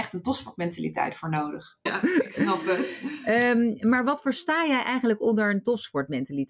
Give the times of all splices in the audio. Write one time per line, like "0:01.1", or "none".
0:01.9